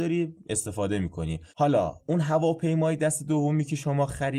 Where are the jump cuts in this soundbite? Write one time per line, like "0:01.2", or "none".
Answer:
0:01.5